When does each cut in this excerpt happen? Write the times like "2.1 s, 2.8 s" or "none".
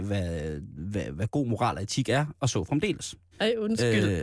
3.3 s